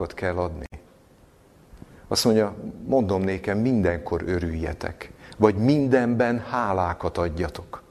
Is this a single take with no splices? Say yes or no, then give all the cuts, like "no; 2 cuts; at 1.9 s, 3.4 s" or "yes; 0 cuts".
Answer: no; 1 cut; at 2.0 s